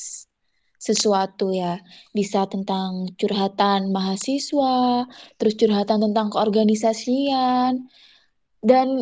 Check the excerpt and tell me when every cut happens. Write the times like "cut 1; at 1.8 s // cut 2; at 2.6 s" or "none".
none